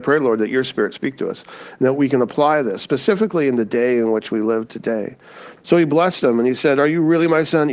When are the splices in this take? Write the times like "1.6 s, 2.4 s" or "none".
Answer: 5.6 s

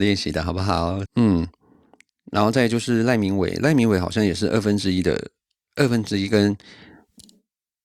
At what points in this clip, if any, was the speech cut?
1.1 s

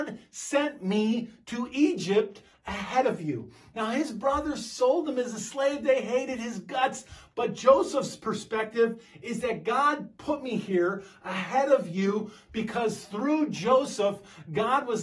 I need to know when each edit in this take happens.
none

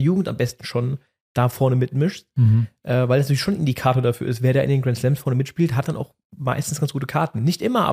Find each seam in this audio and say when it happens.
none

